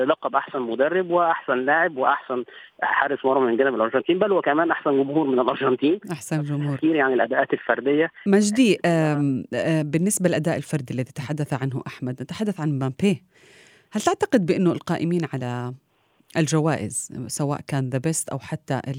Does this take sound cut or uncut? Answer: uncut